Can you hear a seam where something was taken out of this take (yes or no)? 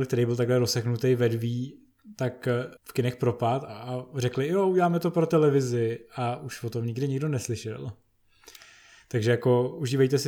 yes